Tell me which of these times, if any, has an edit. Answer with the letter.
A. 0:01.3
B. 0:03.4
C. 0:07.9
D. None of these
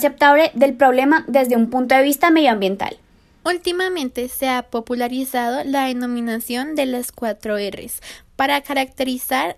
B